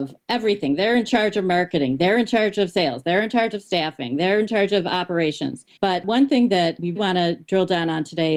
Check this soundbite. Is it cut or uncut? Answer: cut